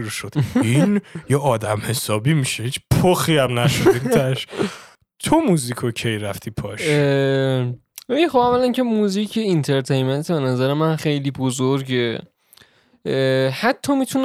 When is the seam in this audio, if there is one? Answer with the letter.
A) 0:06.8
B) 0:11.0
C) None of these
B